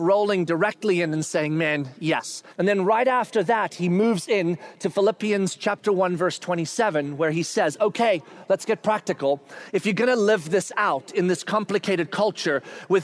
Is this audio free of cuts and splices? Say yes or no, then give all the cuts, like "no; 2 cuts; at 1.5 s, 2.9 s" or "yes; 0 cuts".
no; 1 cut; at 2.5 s